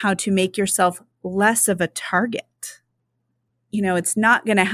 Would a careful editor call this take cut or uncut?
uncut